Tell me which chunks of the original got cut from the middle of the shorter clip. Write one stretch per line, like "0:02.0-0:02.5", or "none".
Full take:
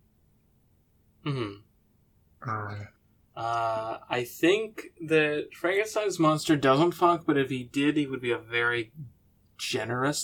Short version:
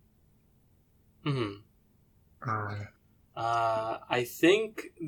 none